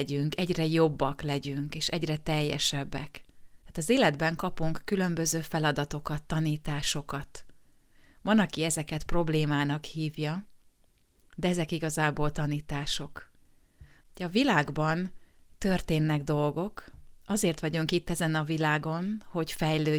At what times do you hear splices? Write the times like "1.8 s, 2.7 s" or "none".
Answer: 14.0 s